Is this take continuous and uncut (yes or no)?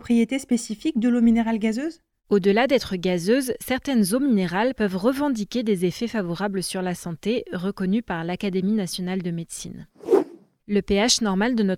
no